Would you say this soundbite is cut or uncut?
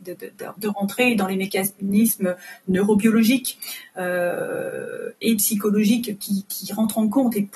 uncut